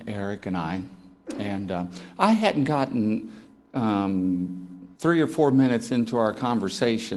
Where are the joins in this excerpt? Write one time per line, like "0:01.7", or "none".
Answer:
0:05.0